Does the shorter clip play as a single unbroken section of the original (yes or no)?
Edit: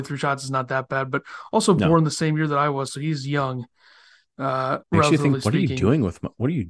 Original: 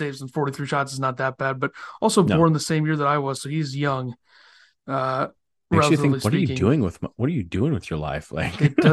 no